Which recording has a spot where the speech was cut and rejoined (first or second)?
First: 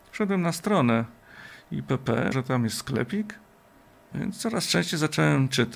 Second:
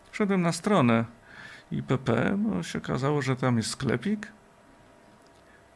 first